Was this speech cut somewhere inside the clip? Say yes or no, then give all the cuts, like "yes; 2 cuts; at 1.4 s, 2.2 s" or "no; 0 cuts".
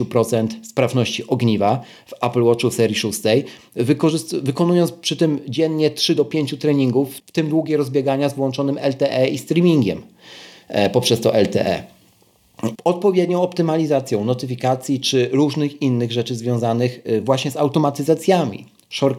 yes; 1 cut; at 12.8 s